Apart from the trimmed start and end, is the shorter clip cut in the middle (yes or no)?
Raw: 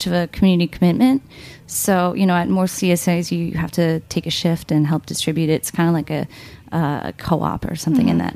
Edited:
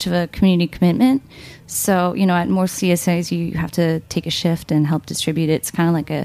no